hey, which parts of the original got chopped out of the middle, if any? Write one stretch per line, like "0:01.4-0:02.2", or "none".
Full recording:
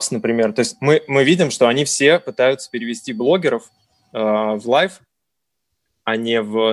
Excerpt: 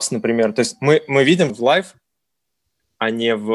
0:01.5-0:04.6